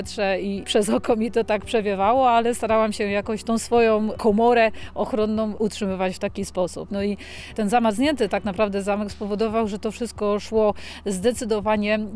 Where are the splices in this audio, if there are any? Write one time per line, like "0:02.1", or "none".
0:06.9